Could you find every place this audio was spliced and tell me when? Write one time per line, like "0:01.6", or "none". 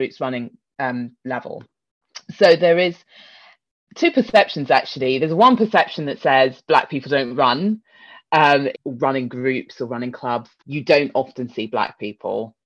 0:08.7
0:10.6